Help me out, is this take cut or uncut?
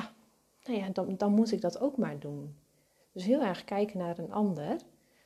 uncut